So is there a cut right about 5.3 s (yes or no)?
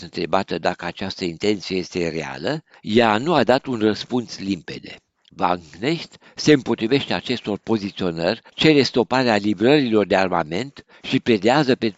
yes